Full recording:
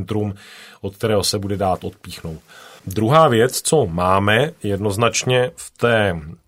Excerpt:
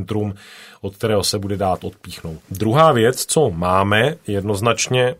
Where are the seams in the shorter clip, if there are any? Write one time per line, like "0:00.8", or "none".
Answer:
0:02.4